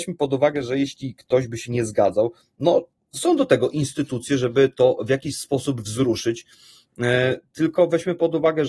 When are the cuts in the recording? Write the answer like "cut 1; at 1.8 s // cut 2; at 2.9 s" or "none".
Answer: none